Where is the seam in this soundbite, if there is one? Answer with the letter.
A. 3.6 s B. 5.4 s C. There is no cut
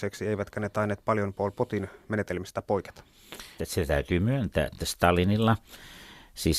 A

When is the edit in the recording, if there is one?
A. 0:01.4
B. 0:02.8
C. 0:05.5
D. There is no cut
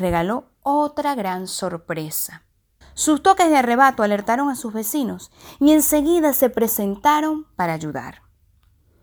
B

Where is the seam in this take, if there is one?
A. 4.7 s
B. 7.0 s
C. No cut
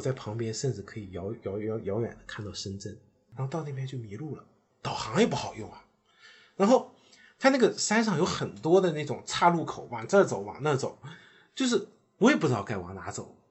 A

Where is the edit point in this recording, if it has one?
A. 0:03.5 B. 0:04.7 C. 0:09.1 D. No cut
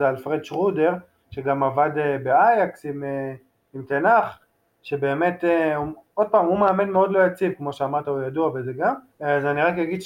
C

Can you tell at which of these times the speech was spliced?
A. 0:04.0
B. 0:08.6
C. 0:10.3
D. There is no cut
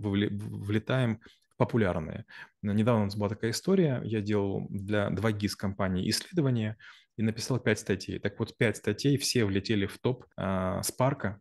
C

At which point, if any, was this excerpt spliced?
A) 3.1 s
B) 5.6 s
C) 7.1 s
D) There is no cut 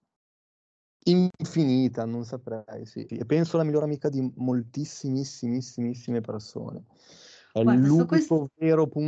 A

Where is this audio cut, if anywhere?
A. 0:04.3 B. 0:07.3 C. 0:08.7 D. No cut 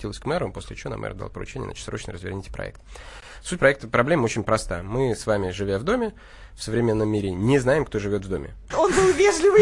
C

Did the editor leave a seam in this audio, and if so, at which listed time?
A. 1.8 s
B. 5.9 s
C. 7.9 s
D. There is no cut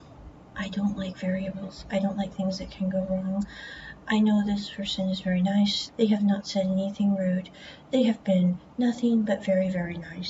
B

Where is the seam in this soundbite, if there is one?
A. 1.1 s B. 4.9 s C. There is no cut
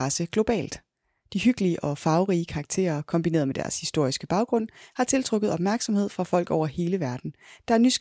C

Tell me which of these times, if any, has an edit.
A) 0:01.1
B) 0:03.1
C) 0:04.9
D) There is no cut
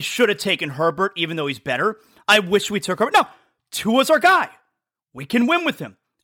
C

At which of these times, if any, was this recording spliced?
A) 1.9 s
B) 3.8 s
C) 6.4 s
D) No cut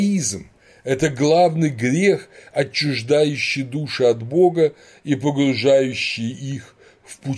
D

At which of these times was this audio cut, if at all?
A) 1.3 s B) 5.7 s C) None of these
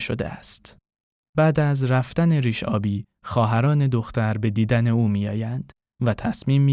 A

